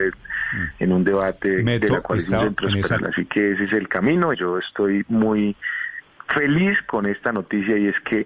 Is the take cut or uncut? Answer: cut